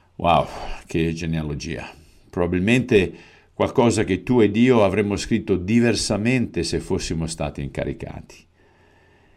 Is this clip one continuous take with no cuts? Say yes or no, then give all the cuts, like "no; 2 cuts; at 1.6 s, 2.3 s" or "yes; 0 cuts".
yes; 0 cuts